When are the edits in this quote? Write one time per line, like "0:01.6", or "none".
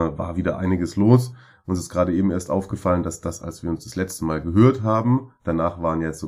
none